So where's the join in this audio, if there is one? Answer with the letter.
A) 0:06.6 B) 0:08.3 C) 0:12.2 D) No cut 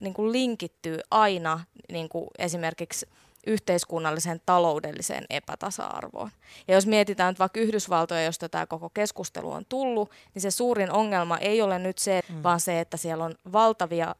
C